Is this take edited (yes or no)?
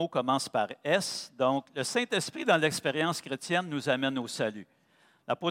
no